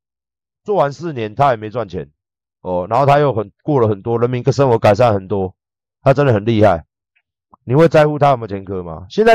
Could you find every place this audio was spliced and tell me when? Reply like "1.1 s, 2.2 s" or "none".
none